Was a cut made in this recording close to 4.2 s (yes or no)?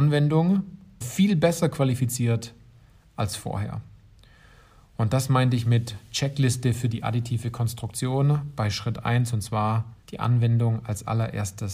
no